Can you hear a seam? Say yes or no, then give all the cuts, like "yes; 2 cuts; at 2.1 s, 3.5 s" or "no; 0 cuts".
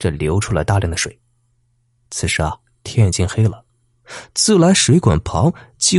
no; 0 cuts